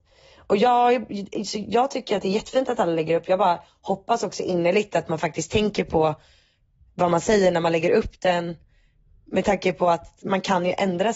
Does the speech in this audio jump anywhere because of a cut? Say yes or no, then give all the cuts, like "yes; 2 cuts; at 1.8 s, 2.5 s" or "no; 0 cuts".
no; 0 cuts